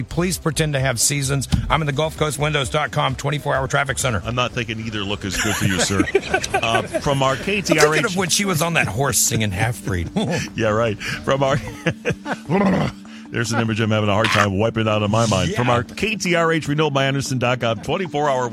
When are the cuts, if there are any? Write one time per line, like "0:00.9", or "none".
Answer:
none